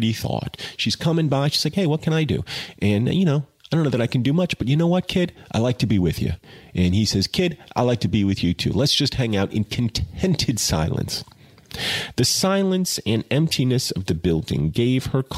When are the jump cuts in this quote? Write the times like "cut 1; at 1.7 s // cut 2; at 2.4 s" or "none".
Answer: none